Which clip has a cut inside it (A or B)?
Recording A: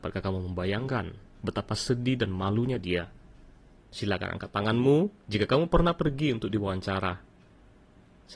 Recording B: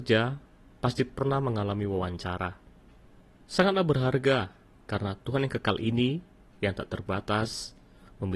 A